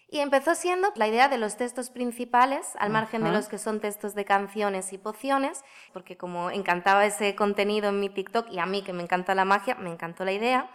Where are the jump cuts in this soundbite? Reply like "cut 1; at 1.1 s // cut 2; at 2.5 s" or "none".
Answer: cut 1; at 1.0 s // cut 2; at 5.9 s